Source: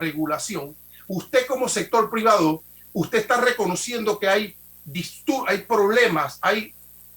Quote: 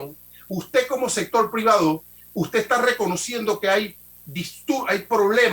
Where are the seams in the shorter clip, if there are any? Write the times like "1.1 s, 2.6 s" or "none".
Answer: none